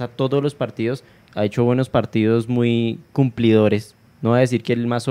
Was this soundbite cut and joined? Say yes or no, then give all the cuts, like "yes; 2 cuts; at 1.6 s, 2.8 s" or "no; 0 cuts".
yes; 1 cut; at 1.3 s